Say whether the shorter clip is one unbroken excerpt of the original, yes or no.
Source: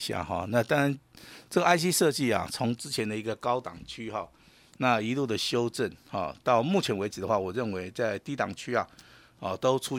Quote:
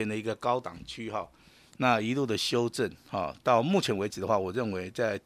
yes